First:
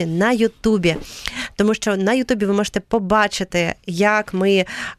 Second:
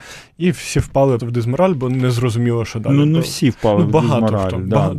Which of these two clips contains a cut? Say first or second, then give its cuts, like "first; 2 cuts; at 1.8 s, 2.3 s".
second; 1 cut; at 1.2 s